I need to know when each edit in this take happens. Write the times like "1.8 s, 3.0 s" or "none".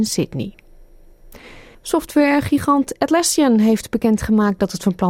1.7 s